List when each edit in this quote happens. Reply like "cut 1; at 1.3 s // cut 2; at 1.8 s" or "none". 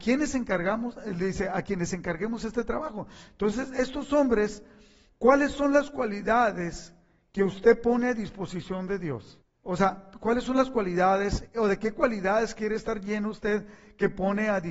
none